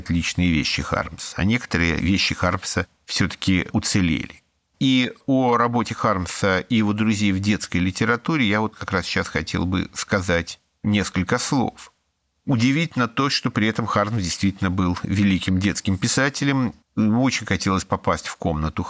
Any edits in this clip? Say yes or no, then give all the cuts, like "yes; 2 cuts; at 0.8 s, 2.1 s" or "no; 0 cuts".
yes; 3 cuts; at 4.7 s, 12.3 s, 16.8 s